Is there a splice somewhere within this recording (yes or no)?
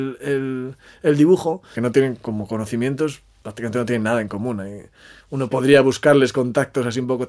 yes